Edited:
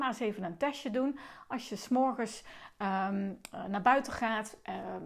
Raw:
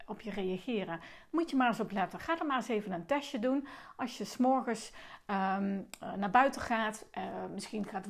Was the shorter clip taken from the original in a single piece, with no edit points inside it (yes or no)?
yes